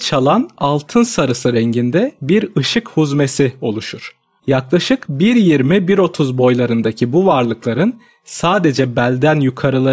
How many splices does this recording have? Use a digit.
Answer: 1